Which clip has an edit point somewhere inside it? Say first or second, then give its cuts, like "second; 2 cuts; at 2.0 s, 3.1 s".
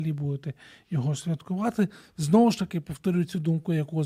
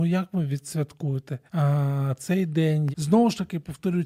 second; 2 cuts; at 1.5 s, 2.9 s